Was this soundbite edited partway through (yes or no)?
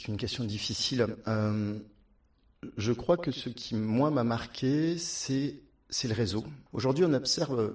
yes